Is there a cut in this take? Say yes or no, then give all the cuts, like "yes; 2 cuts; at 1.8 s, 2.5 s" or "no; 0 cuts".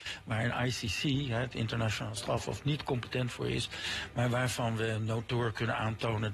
no; 0 cuts